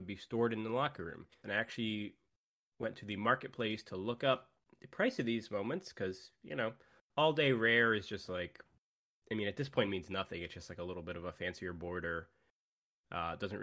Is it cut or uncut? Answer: cut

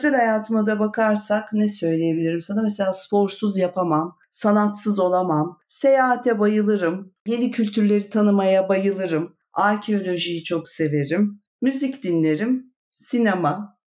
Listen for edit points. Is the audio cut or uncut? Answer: cut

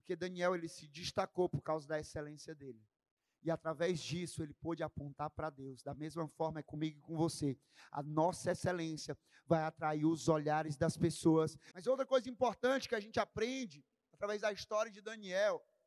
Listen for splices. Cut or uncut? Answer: cut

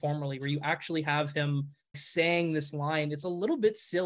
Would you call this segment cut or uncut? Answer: cut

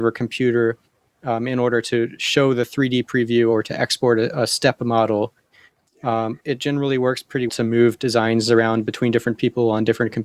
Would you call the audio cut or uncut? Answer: cut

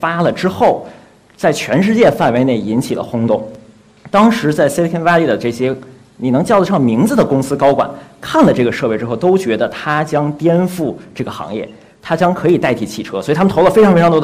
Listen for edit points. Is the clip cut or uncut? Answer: uncut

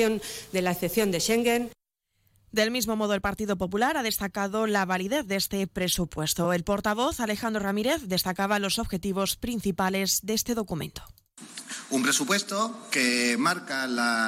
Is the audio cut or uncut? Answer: uncut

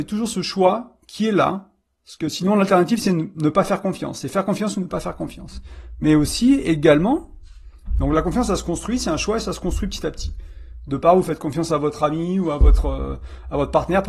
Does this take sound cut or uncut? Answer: uncut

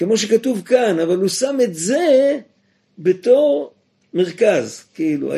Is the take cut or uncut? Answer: uncut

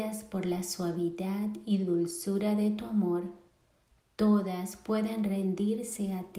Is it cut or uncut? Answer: uncut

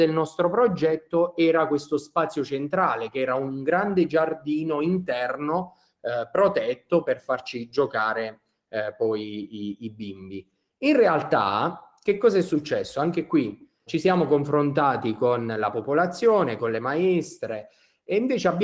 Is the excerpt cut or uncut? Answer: cut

